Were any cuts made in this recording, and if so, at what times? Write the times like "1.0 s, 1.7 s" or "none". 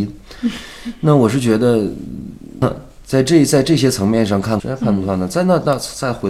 2.6 s, 4.6 s